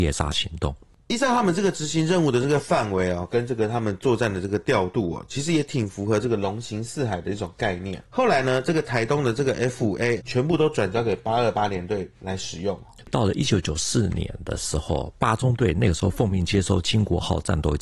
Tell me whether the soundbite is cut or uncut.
cut